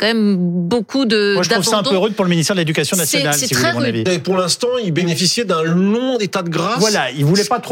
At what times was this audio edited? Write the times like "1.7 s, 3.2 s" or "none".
4.1 s